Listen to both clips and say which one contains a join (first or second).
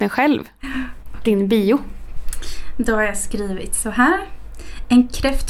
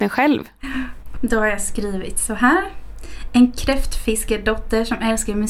second